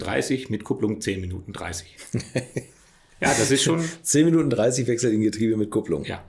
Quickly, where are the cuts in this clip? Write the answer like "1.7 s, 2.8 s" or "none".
none